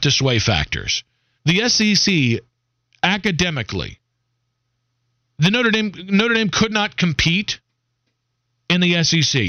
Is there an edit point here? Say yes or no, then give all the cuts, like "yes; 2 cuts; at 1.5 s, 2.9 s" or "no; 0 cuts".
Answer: yes; 1 cut; at 1.4 s